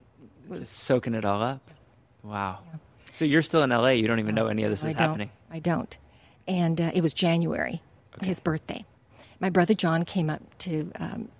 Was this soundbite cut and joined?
no; 0 cuts

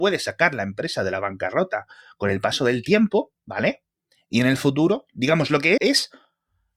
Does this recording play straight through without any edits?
no; 2 cuts; at 3.4 s, 5.8 s

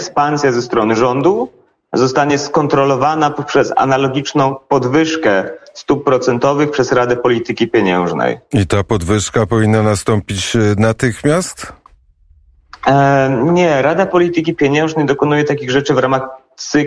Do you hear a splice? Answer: no; 0 cuts

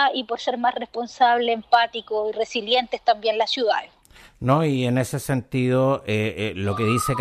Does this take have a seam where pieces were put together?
no; 0 cuts

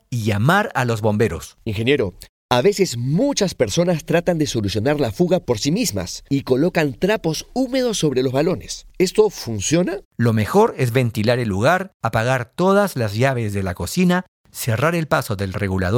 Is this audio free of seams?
no; 1 cut; at 10.0 s

